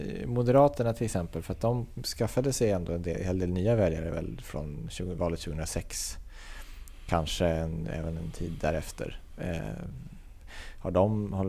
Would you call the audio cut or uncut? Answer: uncut